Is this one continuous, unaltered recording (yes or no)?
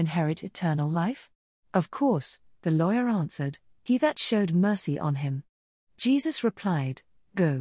no